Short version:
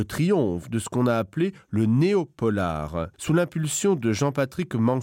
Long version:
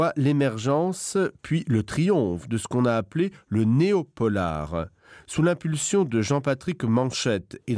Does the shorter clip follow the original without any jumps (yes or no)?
no